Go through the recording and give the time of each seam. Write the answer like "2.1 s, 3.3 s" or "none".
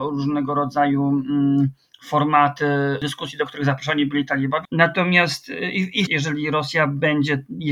4.6 s, 6.1 s